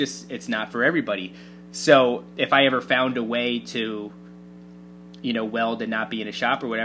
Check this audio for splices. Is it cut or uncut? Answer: uncut